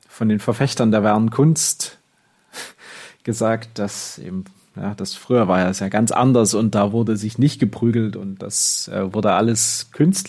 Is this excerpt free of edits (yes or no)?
yes